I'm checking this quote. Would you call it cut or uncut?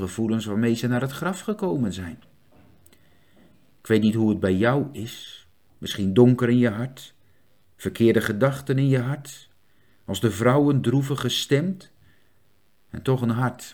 uncut